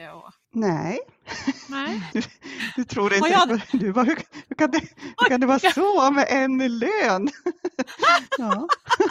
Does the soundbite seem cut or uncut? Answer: cut